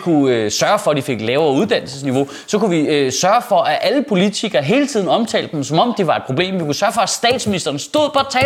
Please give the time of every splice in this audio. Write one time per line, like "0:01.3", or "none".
none